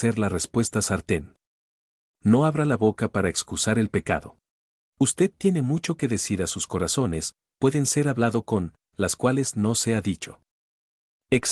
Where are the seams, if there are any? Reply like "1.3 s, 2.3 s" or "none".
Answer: 4.9 s